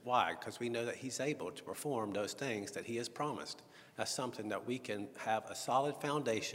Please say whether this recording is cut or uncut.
uncut